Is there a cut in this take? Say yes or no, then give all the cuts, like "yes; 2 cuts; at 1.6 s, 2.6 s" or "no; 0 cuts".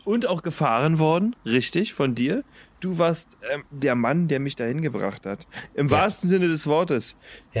yes; 1 cut; at 3.7 s